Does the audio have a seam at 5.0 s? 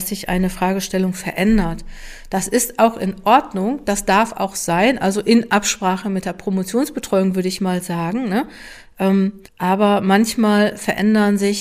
no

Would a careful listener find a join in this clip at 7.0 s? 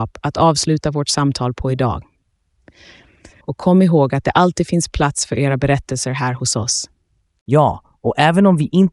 no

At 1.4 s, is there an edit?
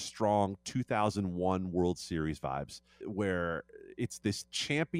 no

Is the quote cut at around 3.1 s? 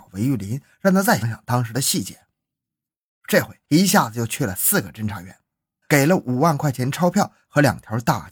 no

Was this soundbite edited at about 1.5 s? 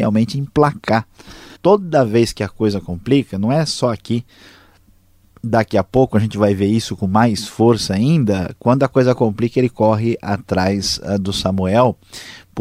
yes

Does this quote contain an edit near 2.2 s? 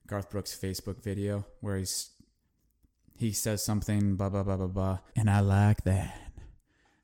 no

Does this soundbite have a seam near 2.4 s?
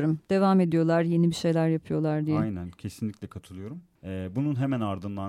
no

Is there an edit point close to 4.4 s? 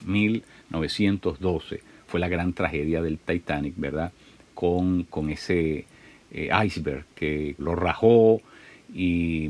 no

